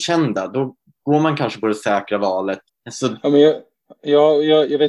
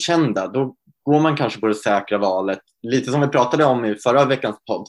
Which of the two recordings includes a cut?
first; 1 cut; at 2.7 s

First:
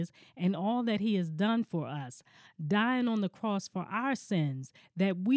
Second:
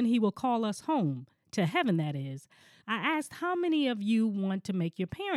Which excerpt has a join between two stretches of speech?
second; 1 cut; at 2.8 s

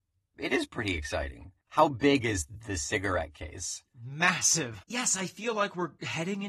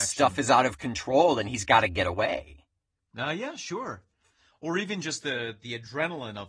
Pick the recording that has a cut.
first; 2 cuts; at 1.7 s, 4.8 s

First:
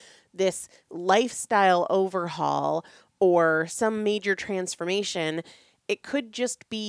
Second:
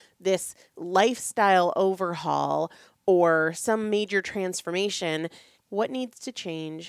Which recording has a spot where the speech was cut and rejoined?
second; 1 cut; at 5.6 s

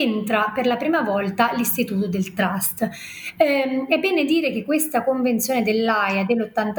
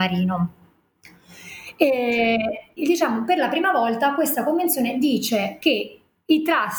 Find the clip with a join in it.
second; 1 cut; at 2.8 s

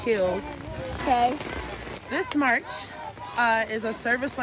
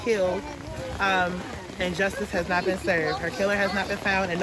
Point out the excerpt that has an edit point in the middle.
first; 1 cut; at 1.0 s

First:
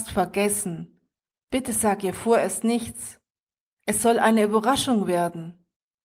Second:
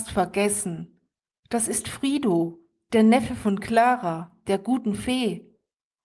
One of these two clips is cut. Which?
first; 1 cut; at 1.4 s

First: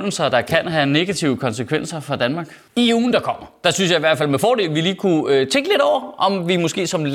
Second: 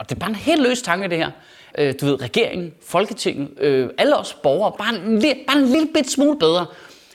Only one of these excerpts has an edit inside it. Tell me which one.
second; 2 cuts; at 1.7 s, 4.8 s

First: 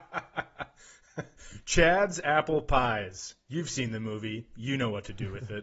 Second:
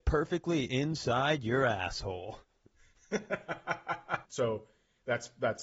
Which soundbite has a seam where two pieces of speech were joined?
second; 1 cut; at 4.2 s

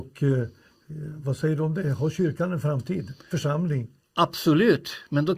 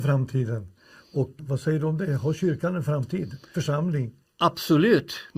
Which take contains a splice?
second; 1 cut; at 1.4 s

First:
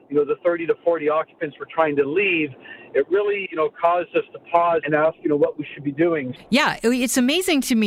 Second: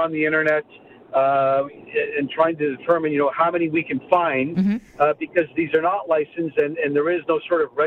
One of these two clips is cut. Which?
first; 3 cuts; at 3.5 s, 4.8 s, 6.4 s

